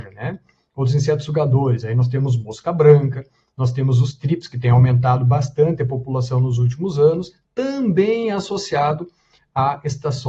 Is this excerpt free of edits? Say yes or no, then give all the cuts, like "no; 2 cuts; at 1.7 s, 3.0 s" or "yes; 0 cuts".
yes; 0 cuts